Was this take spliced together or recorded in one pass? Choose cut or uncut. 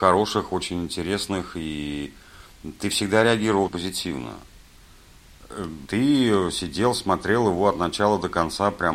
cut